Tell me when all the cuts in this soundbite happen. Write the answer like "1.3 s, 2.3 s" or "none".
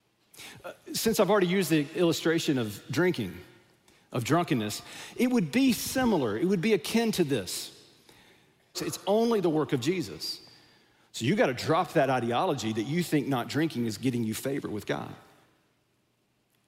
8.7 s